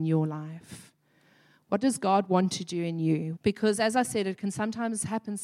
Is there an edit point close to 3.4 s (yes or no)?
yes